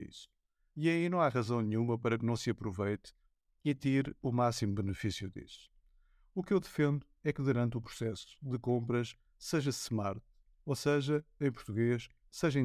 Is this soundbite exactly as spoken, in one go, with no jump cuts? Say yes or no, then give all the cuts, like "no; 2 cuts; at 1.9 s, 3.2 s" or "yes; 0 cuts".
yes; 0 cuts